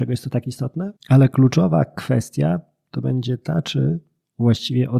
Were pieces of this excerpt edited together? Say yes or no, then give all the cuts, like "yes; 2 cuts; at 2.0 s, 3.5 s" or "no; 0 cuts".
yes; 1 cut; at 1.0 s